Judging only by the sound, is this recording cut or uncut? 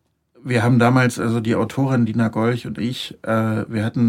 uncut